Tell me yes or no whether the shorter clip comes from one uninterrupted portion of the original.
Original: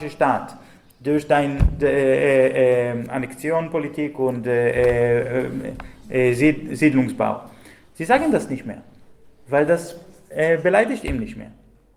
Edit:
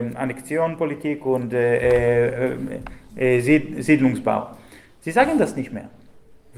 yes